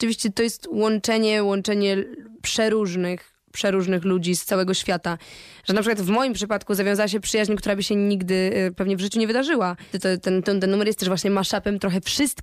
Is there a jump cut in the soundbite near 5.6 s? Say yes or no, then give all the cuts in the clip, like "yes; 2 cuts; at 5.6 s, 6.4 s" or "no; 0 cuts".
no; 1 cut; at 9.9 s